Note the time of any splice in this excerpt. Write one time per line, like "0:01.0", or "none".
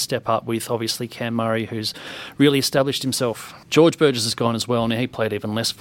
0:03.6